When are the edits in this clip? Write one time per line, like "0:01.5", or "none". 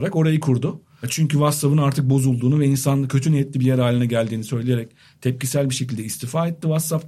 none

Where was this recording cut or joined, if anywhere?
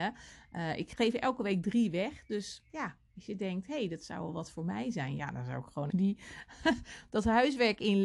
0:05.9

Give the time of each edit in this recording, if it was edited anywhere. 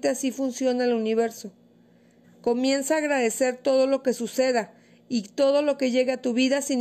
0:02.2

